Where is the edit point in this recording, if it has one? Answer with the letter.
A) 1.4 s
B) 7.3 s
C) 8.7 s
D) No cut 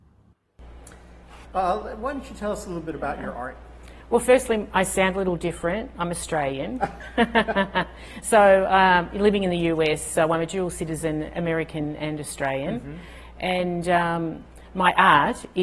A